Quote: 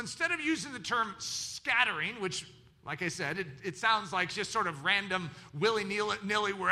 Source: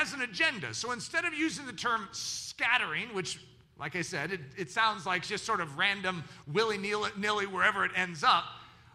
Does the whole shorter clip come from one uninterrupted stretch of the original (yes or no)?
yes